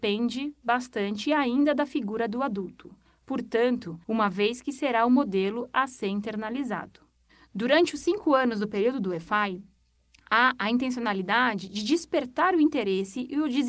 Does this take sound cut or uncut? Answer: cut